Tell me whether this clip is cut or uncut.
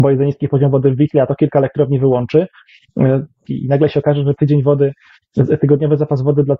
cut